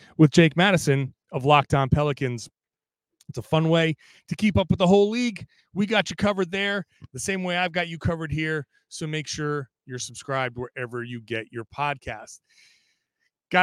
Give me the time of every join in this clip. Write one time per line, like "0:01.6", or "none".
none